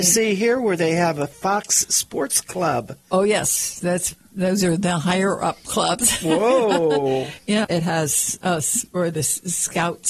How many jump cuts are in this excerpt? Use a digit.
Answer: 1